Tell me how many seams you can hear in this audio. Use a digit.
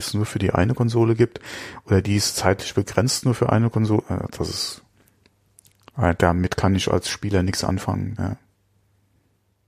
1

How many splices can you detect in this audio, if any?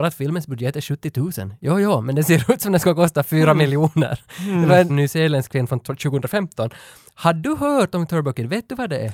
1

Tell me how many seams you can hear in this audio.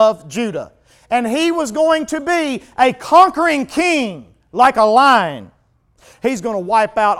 1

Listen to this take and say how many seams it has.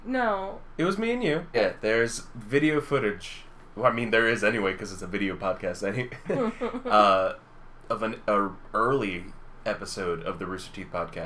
1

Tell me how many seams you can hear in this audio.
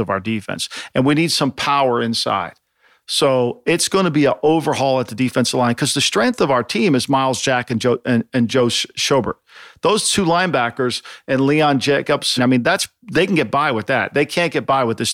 1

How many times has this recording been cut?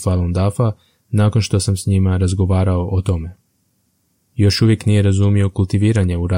1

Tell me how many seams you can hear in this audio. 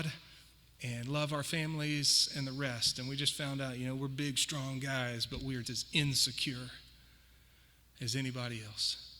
1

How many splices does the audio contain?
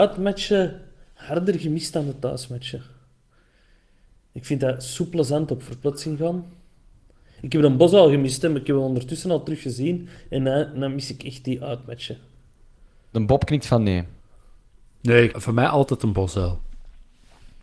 1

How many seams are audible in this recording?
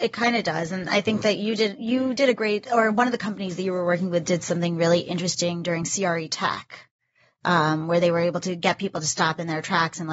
1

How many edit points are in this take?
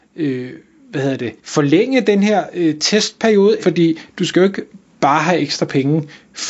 2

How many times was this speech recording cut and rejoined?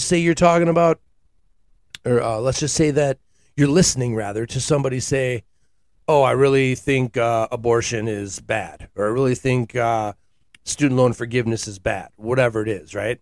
0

